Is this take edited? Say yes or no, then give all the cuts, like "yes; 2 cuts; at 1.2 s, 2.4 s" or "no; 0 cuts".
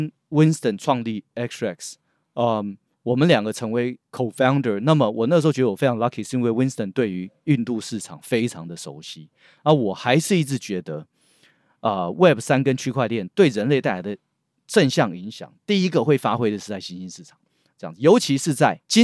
no; 0 cuts